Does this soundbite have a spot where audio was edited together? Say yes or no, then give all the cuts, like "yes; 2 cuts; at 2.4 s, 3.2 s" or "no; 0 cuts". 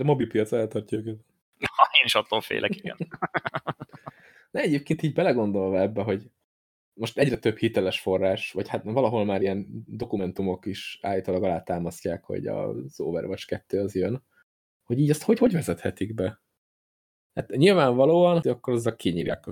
yes; 1 cut; at 18.4 s